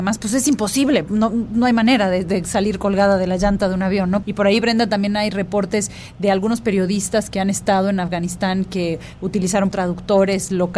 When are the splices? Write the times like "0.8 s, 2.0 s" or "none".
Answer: 4.2 s, 9.7 s